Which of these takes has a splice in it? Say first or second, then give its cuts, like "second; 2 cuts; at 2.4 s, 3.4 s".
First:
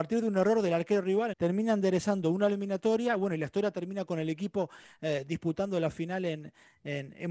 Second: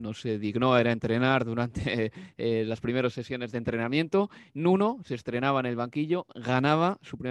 first; 1 cut; at 1.3 s